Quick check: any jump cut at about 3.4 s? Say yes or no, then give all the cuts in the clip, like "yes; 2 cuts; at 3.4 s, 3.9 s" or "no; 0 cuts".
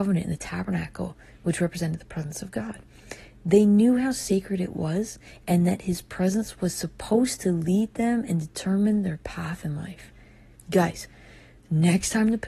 no; 1 cut; at 10.6 s